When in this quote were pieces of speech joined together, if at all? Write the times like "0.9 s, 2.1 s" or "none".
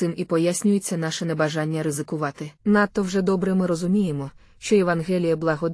2.6 s